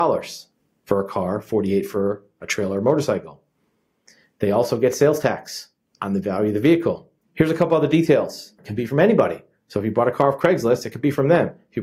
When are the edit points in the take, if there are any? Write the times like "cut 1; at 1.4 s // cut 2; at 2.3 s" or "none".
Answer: cut 1; at 7.2 s // cut 2; at 8.6 s